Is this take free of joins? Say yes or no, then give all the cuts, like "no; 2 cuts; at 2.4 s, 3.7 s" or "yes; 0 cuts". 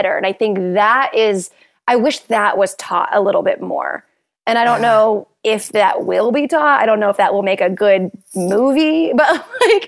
yes; 0 cuts